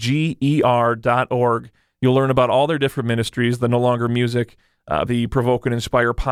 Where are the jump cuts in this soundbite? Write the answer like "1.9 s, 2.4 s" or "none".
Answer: 5.1 s